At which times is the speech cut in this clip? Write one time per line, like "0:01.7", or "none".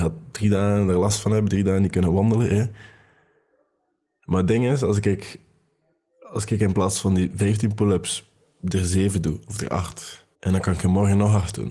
0:10.3

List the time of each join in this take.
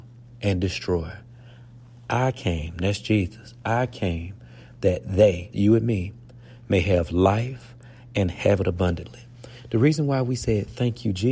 0:05.5

